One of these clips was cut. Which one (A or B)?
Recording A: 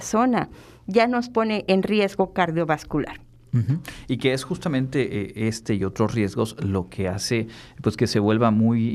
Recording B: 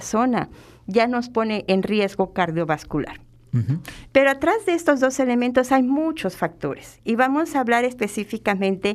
B